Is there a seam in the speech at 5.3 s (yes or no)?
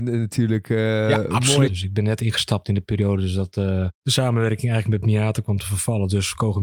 no